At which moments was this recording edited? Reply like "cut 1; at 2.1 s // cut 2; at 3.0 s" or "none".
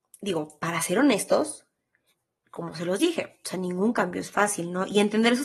none

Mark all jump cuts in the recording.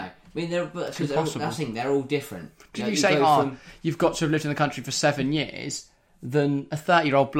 none

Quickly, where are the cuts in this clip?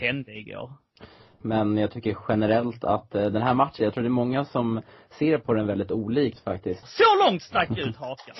cut 1; at 1.4 s // cut 2; at 6.8 s

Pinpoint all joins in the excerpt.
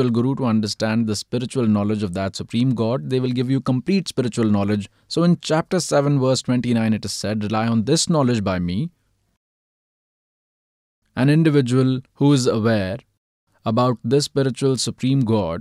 cut 1; at 12.1 s

